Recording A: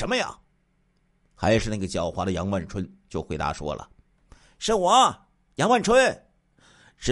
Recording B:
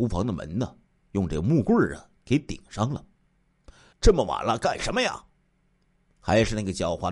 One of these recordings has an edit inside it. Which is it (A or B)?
B